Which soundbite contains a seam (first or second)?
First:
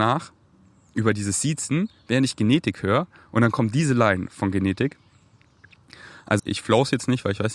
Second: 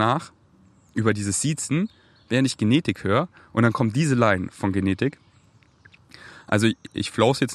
first